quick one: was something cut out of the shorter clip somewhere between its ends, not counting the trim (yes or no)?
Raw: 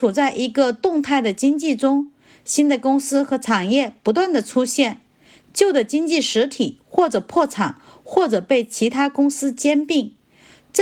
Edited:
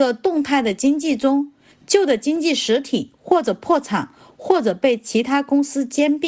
yes